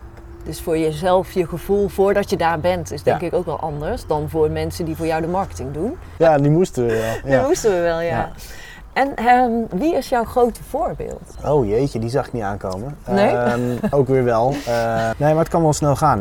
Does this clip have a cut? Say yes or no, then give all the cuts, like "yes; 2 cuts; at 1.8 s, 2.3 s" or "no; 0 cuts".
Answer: yes; 3 cuts; at 6.2 s, 13.9 s, 15.1 s